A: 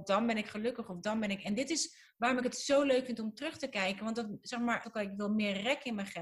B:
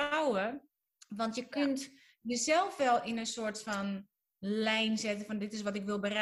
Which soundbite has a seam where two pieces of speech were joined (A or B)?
A